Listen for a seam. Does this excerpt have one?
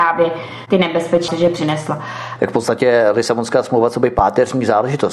yes; 2 cuts; at 1.3 s, 2.4 s

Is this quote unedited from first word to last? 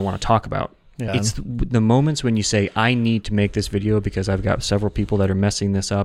no; 1 cut; at 1.1 s

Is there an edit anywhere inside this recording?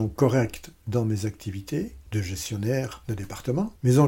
no; 0 cuts

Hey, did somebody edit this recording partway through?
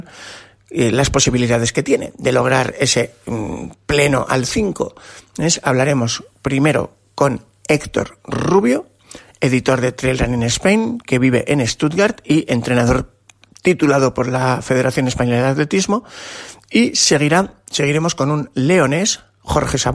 no; 0 cuts

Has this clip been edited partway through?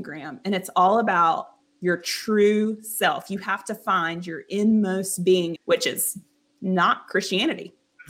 yes; 1 cut; at 5.6 s

